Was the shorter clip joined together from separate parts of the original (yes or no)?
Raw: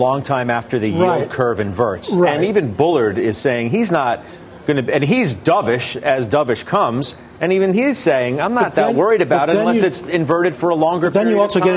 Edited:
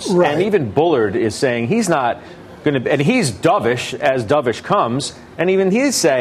no